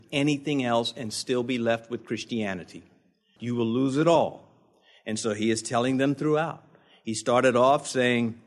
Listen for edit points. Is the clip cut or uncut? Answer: cut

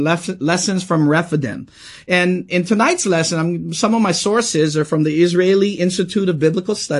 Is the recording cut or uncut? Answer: uncut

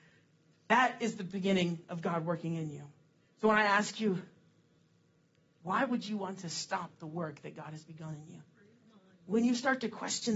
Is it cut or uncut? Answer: uncut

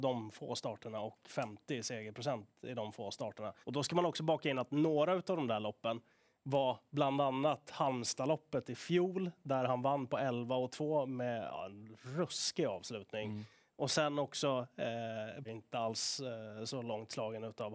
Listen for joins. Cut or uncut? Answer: cut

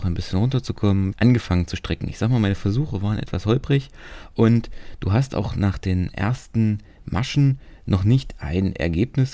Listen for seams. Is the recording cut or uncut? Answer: cut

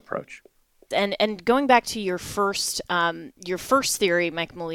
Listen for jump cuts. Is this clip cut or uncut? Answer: cut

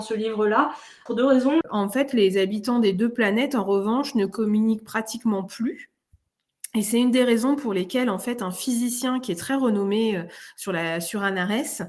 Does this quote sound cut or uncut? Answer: cut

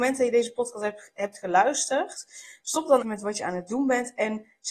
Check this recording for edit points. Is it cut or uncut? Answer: cut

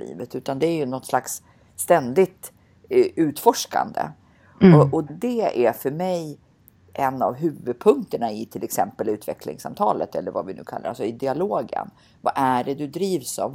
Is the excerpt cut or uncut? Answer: cut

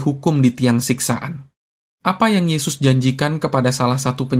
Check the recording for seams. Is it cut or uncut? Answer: cut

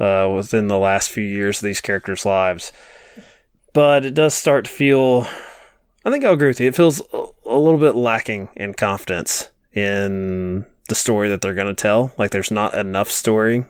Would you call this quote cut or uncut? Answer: uncut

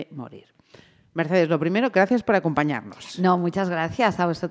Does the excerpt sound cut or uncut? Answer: uncut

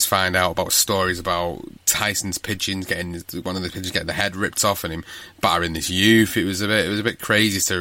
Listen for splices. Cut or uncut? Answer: uncut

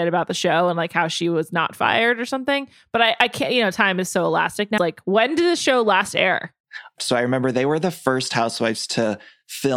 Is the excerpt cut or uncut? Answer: cut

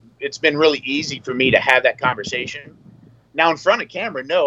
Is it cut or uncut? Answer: uncut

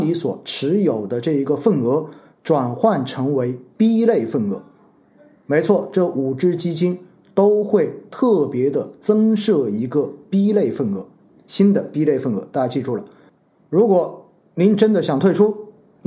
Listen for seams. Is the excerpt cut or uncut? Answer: uncut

